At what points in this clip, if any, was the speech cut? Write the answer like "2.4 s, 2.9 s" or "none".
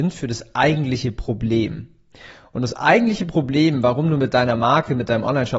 none